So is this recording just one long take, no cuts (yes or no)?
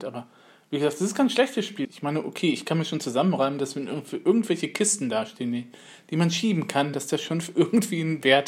no